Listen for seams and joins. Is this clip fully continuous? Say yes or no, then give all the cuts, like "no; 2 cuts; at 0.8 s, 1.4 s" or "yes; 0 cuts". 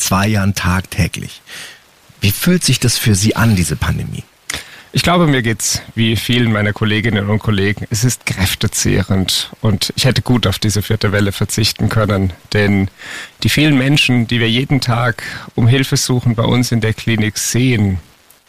yes; 0 cuts